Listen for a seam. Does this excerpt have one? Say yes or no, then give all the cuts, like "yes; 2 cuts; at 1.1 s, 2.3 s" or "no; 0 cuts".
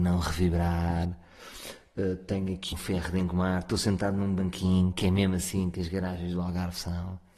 yes; 2 cuts; at 2.7 s, 4.9 s